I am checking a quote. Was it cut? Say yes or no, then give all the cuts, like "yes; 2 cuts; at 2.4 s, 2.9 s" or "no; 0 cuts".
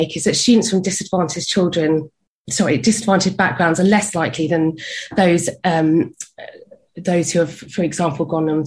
no; 0 cuts